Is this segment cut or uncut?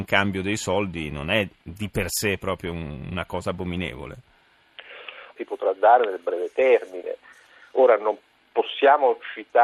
cut